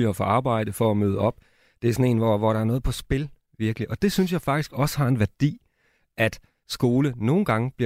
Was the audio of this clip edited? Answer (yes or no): no